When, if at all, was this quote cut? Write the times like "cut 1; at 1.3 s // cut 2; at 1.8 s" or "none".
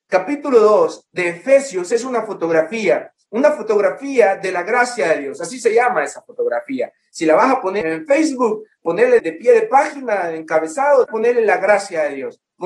cut 1; at 7.8 s // cut 2; at 9.2 s // cut 3; at 11.0 s